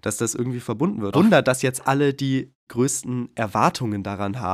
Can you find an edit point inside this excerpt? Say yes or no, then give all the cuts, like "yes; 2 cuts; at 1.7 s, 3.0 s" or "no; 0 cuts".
yes; 1 cut; at 1.1 s